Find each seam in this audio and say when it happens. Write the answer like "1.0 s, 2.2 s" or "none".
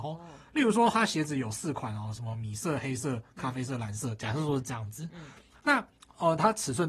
none